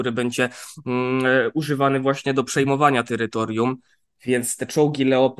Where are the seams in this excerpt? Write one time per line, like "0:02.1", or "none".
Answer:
none